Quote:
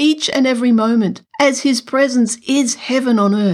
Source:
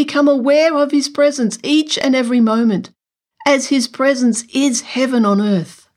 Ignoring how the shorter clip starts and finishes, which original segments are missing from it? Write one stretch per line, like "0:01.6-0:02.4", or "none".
0:03.0-0:03.4